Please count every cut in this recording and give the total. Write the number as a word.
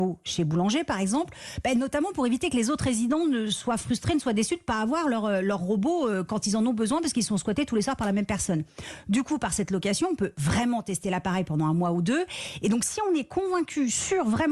zero